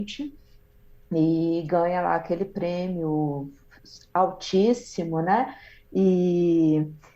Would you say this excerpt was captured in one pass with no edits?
yes; 0 cuts

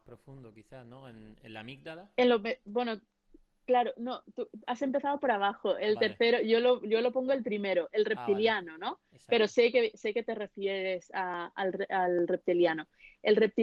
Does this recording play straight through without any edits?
yes; 0 cuts

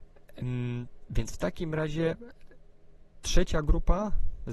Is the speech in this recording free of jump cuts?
no; 1 cut; at 1.1 s

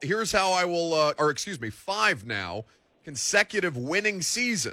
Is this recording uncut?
no; 1 cut; at 1.2 s

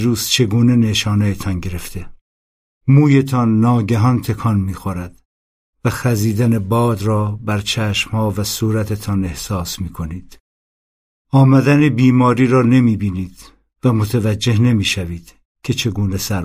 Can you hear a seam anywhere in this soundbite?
yes; 1 cut; at 2.7 s

